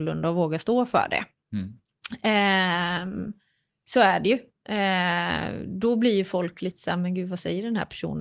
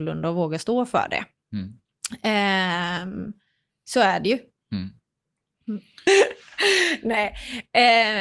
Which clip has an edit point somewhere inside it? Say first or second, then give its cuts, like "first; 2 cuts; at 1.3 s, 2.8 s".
second; 2 cuts; at 4.6 s, 6.1 s